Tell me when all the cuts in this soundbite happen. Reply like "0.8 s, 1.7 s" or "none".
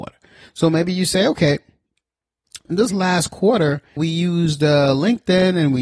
2.7 s, 4.0 s